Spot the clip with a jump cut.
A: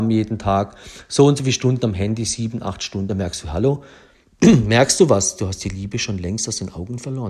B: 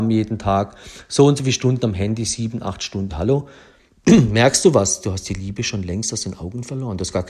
B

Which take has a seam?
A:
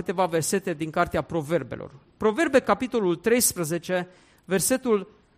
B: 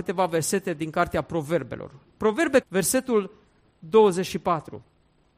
B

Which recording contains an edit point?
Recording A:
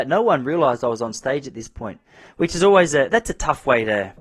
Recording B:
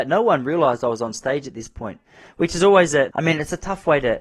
B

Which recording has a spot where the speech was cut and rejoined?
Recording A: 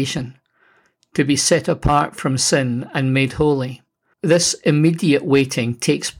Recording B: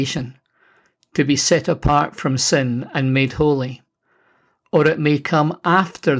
A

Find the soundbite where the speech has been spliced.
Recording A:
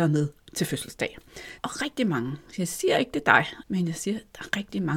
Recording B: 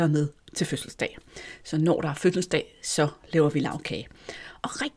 A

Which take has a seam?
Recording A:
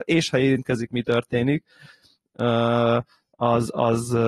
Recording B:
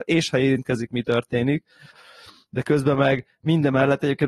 B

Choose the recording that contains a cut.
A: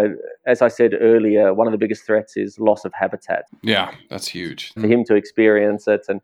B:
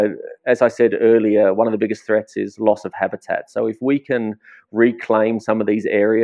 A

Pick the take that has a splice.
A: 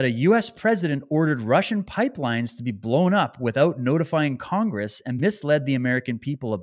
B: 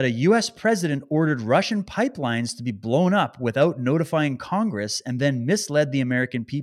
A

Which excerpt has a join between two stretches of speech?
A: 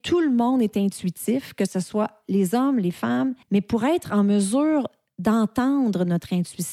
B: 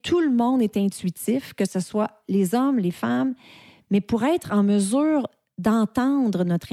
A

